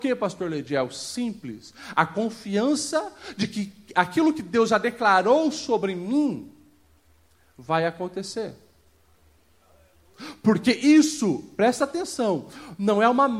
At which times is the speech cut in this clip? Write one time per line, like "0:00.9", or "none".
none